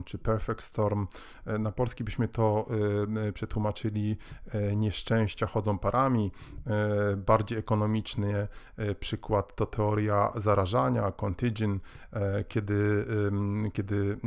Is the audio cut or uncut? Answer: uncut